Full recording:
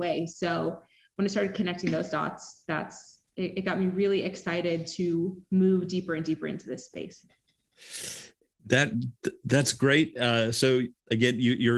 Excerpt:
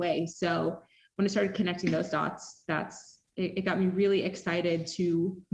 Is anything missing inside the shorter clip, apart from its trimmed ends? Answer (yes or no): no